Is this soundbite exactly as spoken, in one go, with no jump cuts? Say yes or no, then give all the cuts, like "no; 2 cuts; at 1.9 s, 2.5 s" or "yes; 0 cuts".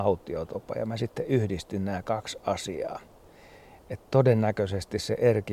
yes; 0 cuts